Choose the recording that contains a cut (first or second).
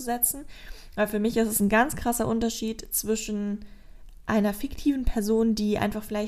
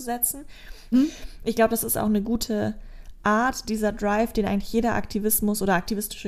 second